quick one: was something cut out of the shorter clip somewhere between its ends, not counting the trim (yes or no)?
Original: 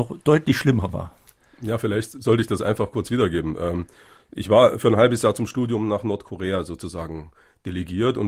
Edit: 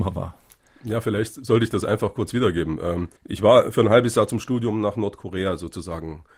yes